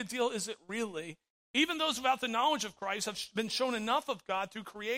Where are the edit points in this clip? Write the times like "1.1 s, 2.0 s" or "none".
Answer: 1.4 s